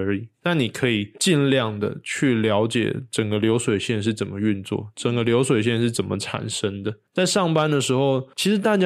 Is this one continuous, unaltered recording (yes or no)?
yes